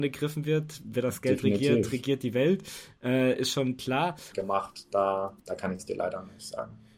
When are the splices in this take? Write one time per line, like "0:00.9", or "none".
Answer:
0:04.3
0:05.4